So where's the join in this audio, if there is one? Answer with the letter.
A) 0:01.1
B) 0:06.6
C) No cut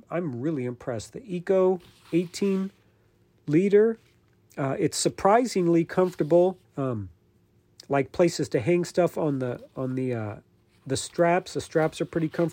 B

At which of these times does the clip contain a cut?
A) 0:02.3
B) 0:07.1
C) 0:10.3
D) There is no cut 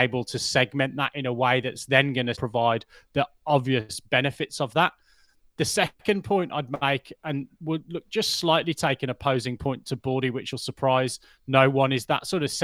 A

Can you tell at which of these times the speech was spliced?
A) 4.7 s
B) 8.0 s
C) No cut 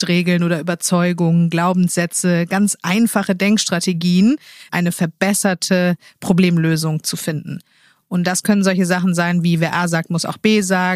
A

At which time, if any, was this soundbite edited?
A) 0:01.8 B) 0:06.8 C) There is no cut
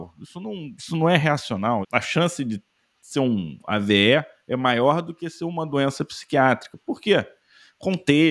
A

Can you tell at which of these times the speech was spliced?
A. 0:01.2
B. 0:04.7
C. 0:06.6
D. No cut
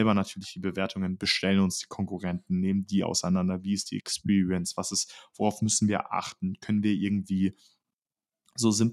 D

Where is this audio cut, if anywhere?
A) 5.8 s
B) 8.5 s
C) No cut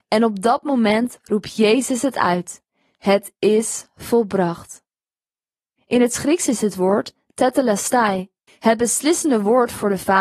B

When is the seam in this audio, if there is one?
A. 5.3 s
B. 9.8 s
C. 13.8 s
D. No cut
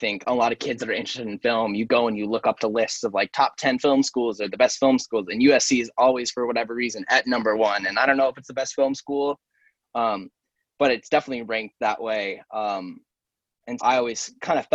C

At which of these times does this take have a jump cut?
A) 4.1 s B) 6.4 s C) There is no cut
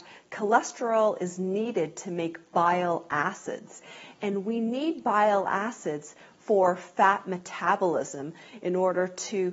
C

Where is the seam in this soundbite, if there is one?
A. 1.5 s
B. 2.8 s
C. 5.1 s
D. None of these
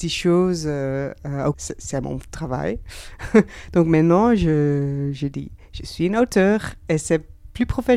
A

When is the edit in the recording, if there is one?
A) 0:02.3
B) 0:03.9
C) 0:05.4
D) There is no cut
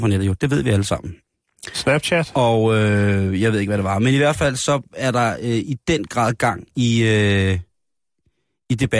D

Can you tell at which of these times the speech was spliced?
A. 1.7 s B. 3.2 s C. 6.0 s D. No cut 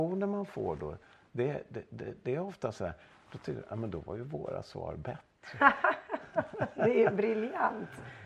D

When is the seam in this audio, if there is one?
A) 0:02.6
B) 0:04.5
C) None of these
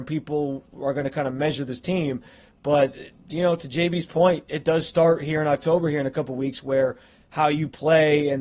B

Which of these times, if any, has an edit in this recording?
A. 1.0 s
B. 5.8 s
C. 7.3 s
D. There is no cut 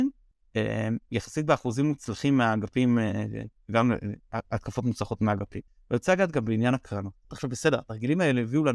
C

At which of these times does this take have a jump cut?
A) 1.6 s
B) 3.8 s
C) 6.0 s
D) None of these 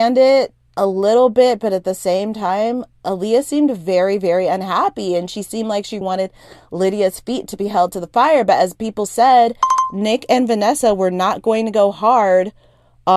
C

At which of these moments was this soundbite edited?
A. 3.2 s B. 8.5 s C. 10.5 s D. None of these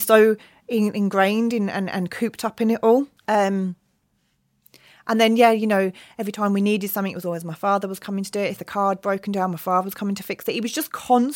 A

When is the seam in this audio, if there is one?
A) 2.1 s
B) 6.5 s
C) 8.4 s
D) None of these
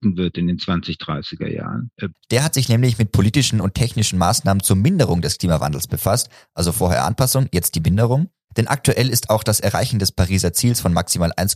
A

